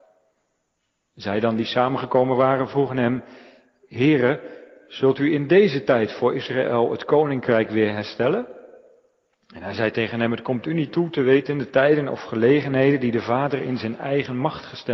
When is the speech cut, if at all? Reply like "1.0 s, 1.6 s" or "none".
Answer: none